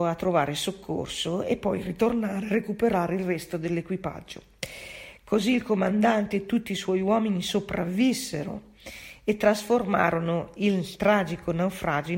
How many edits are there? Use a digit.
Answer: 0